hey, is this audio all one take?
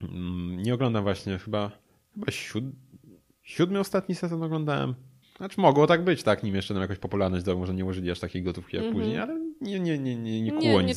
no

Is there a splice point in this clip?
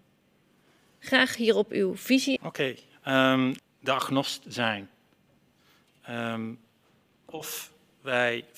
yes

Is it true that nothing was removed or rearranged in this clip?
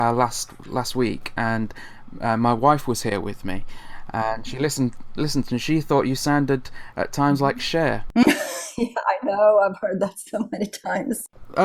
yes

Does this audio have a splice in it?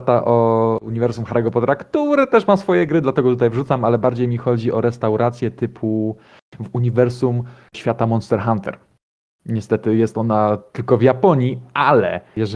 no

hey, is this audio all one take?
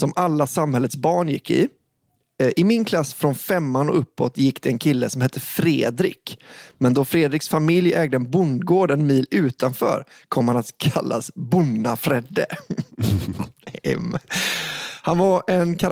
yes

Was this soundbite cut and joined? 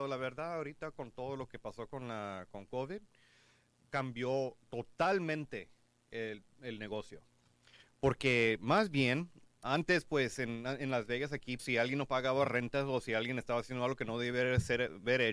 yes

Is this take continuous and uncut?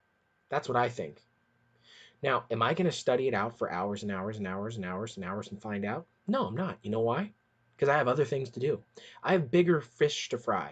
yes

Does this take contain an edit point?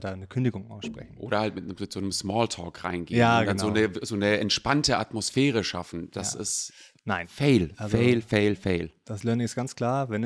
no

